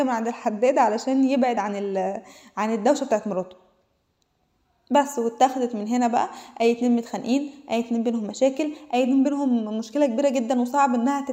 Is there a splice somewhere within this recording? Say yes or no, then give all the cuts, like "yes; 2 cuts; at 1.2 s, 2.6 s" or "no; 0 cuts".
no; 0 cuts